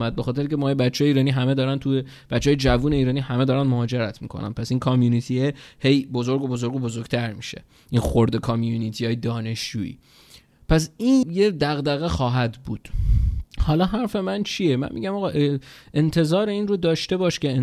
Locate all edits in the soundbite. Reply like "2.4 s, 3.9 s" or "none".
11.2 s, 13.5 s